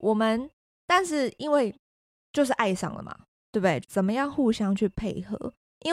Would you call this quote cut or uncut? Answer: cut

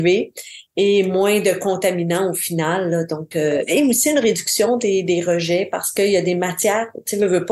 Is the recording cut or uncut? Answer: uncut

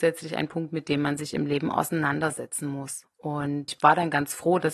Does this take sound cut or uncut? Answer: uncut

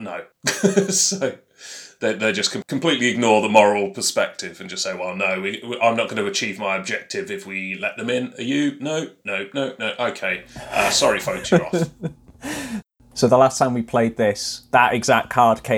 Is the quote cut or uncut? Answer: uncut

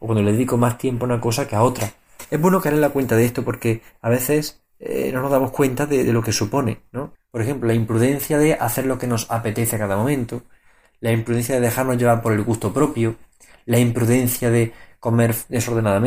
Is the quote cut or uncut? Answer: cut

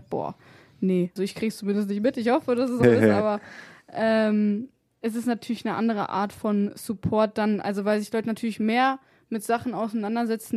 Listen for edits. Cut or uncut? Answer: cut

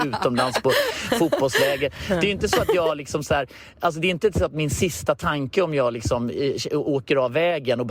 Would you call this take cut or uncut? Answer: uncut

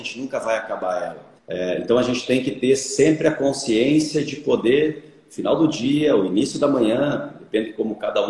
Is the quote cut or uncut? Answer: cut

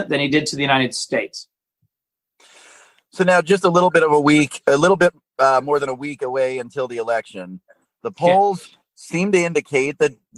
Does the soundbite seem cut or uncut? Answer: uncut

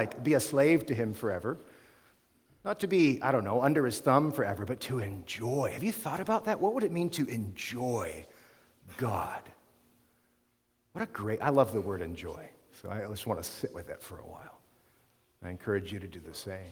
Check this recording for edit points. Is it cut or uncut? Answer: uncut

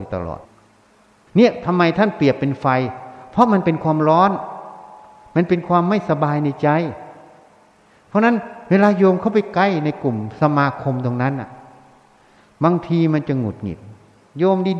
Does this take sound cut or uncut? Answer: uncut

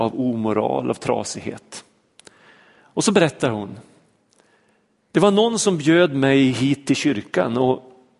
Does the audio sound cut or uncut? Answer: uncut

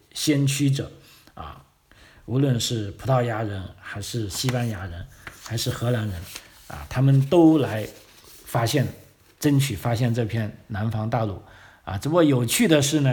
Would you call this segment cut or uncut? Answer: uncut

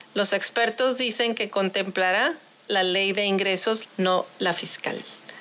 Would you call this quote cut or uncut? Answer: cut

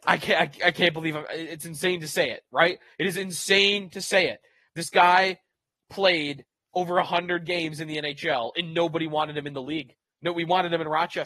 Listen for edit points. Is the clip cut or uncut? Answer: uncut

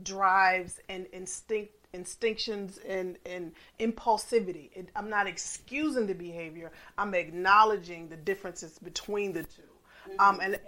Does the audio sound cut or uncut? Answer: uncut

